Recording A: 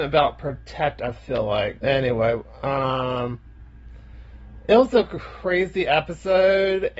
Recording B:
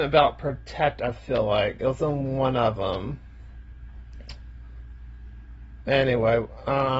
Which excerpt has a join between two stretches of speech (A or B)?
A